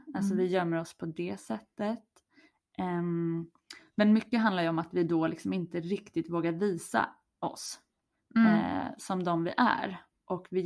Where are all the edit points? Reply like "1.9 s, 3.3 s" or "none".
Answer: 9.0 s